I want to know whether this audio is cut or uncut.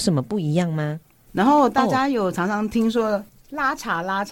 cut